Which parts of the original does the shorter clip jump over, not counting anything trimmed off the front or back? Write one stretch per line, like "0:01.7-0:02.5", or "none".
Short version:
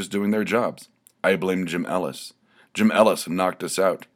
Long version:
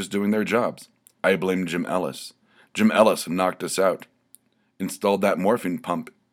none

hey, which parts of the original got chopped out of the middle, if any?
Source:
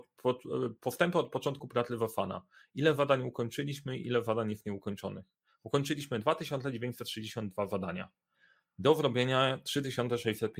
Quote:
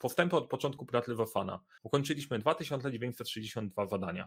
0:02.6-0:05.6

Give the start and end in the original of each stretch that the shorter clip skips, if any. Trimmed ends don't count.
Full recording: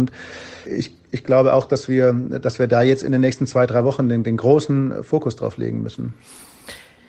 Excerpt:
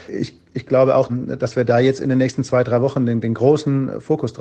0:01.7-0:02.1

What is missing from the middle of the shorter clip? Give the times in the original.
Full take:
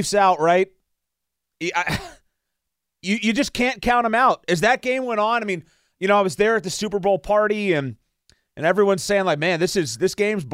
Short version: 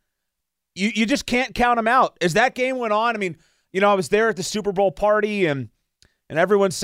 none

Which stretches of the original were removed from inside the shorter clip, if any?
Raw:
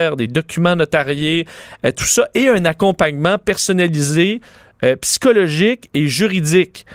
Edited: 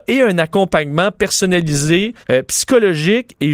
0:04.5-0:04.7

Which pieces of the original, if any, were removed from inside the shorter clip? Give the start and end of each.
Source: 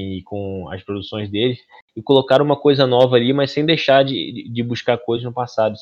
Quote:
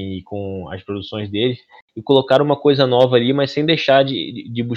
none

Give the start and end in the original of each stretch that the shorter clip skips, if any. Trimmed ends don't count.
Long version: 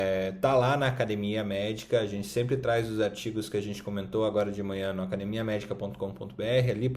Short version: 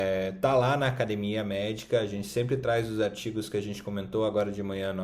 none

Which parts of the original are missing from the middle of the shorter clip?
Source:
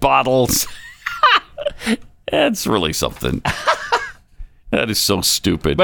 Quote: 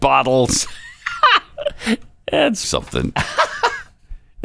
0:02.6-0:02.9

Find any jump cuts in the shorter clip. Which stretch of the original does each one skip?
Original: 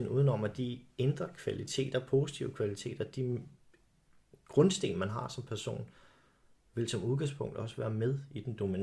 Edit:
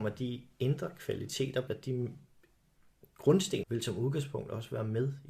0:02.1-0:03.0
0:04.9-0:06.7

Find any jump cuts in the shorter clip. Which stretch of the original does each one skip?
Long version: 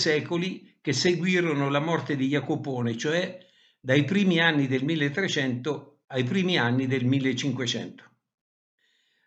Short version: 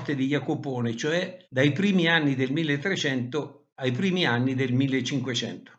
0:03.5-0:03.8

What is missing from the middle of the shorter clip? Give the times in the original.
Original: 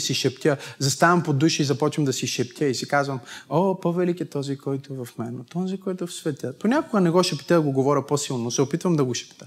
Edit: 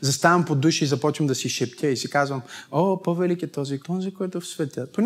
0:04.6-0:05.5

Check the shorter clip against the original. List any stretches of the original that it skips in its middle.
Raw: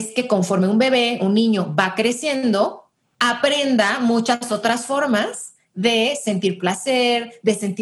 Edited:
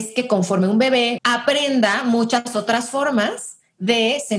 0:01.2-0:03.1

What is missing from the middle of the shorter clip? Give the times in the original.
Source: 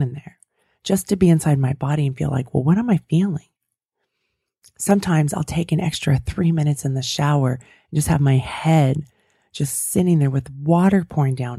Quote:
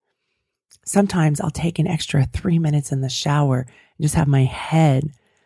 none

